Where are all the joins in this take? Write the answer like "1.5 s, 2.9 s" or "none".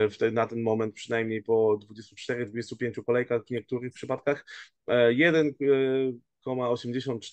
none